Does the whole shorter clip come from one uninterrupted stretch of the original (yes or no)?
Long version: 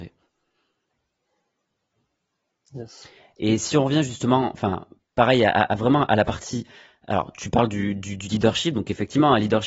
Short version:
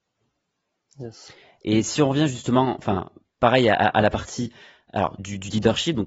no